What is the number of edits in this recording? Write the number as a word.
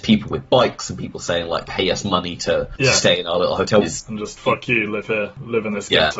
two